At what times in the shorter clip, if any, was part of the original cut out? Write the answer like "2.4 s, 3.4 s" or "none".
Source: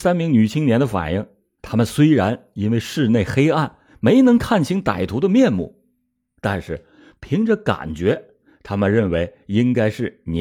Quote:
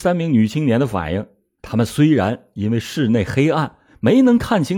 none